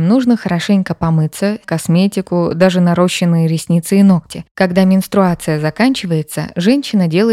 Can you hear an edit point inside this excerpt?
yes; 2 cuts; at 1.6 s, 4.5 s

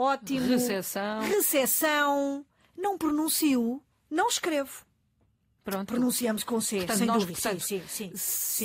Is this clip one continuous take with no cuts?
no; 2 cuts; at 5.9 s, 7.3 s

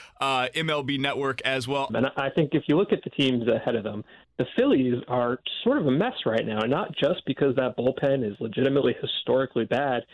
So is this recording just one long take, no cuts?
no; 1 cut; at 1.9 s

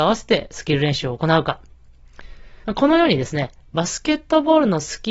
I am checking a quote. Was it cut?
yes; 1 cut; at 2.6 s

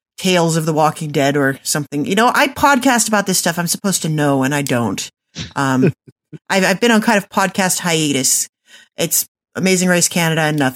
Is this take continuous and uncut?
yes; 0 cuts

